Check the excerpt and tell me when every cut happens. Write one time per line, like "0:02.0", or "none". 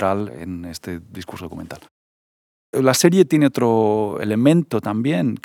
none